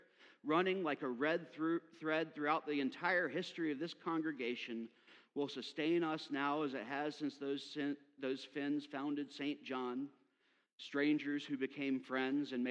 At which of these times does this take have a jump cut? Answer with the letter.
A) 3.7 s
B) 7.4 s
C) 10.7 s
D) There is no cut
C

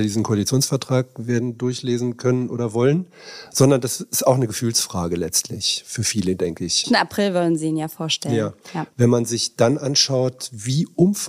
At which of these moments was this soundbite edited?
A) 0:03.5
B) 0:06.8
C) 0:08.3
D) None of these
B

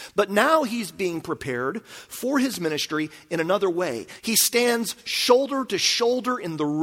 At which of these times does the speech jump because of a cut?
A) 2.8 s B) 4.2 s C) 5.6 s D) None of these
B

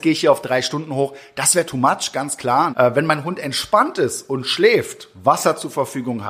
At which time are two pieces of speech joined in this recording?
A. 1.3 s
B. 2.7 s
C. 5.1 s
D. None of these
B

